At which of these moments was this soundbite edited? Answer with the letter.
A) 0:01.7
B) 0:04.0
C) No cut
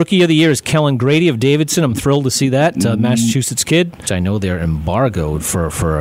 B